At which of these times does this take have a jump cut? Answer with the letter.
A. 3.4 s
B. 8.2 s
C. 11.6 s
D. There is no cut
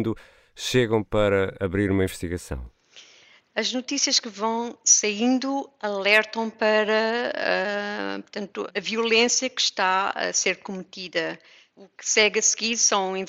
D